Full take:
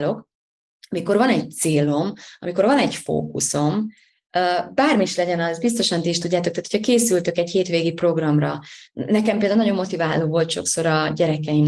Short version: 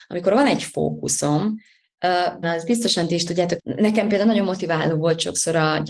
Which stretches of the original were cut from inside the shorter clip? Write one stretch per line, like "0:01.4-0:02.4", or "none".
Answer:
0:04.7-0:05.4
0:06.5-0:08.9